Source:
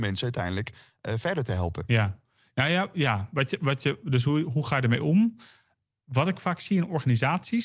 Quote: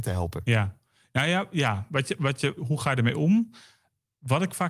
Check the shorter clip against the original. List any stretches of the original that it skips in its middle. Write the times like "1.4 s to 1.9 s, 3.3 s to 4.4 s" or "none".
4.0 s to 4.4 s

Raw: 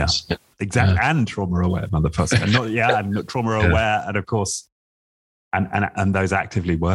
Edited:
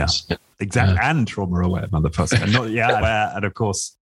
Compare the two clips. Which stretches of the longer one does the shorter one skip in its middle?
3.0 s to 3.7 s

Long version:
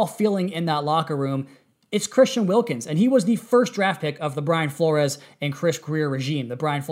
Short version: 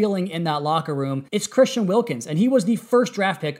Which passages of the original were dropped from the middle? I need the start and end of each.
1.5 s to 1.9 s

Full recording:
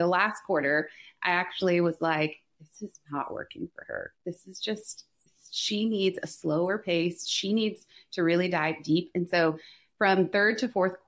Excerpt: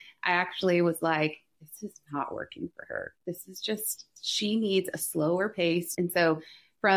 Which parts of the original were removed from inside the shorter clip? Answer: 5.2 s to 5.5 s, 7.2 s to 9.1 s

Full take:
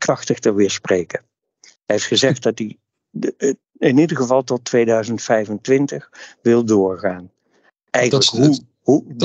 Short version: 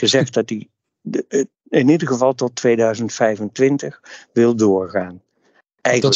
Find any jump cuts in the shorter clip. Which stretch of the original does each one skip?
none

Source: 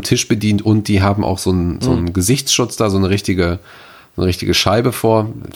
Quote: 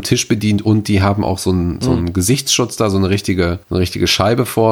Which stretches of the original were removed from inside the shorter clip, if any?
3.6 s to 4.1 s

